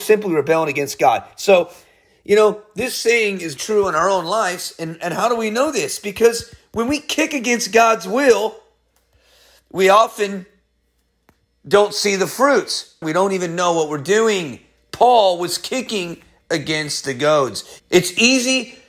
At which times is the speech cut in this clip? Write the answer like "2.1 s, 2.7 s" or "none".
3.6 s, 13.0 s, 17.8 s